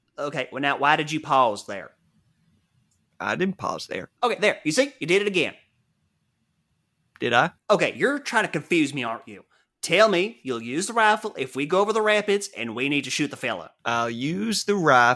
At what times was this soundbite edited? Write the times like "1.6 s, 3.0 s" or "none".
13.8 s